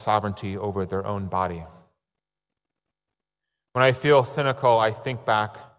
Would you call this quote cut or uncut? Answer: uncut